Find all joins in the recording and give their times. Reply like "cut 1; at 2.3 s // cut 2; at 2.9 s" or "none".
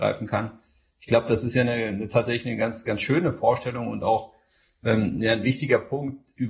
none